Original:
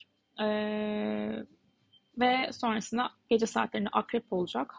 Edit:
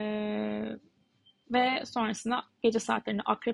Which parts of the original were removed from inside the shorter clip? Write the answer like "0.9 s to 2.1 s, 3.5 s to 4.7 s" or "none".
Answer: none